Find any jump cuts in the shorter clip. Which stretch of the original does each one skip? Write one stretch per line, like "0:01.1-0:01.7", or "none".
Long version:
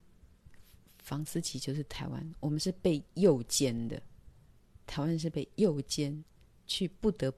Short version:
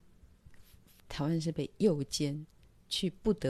0:01.0-0:04.8